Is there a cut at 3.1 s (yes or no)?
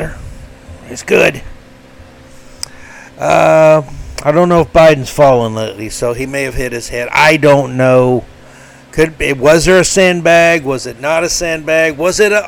no